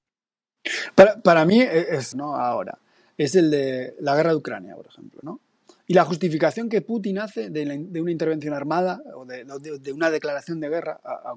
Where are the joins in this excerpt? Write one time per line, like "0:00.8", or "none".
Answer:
0:02.1

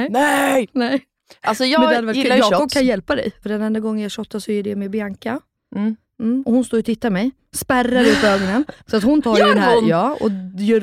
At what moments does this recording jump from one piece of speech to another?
0:03.4
0:08.8

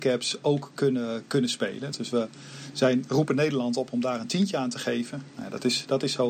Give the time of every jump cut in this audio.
0:01.9

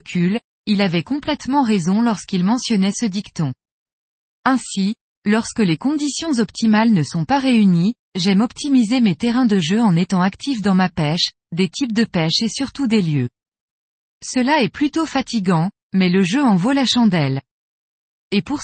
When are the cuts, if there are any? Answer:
0:08.1
0:11.4

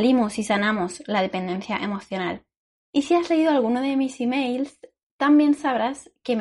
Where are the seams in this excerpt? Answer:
0:02.8

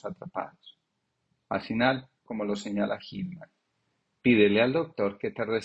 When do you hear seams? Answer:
0:02.3

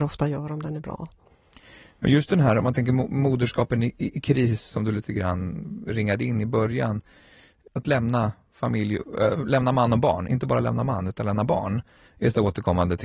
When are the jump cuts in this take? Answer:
none

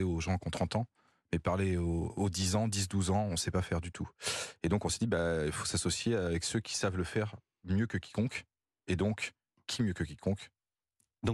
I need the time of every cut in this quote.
none

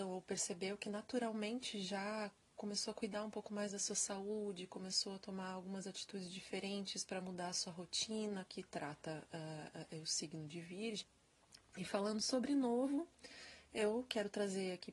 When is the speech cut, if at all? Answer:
0:08.5
0:11.6

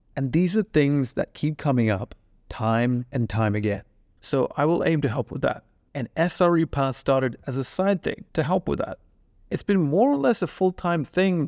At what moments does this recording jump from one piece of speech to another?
0:04.2
0:05.9

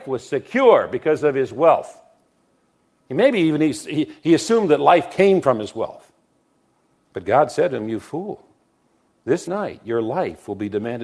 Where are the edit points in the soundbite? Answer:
0:07.0
0:09.5

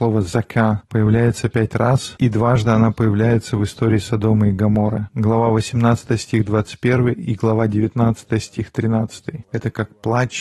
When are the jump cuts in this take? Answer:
0:09.5

